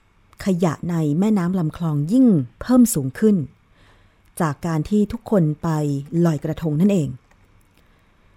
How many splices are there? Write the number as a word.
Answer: one